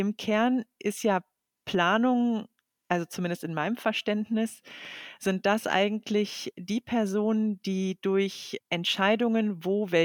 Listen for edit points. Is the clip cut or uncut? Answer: uncut